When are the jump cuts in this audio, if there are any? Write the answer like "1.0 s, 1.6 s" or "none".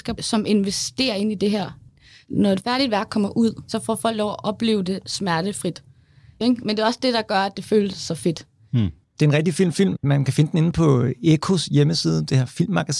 6.4 s